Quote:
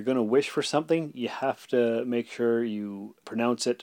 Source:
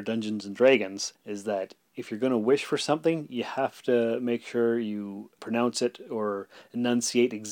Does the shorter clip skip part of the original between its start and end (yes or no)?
no